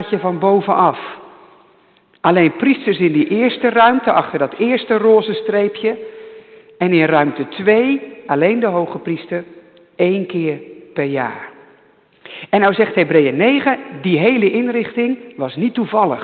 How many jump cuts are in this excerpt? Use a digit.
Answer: 0